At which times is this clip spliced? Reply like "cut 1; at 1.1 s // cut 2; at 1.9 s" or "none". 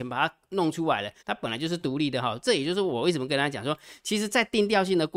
cut 1; at 1.2 s